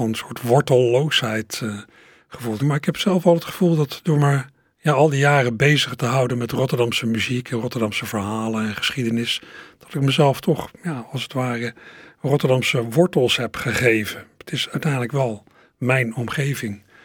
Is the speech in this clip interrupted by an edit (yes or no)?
yes